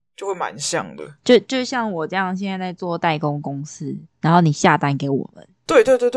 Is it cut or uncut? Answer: cut